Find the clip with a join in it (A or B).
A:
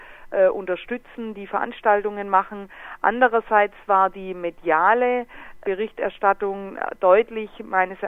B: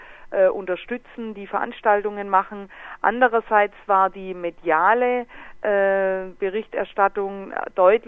A